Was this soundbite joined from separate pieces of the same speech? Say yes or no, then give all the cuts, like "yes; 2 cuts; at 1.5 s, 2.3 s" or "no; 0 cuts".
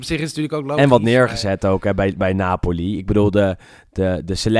no; 0 cuts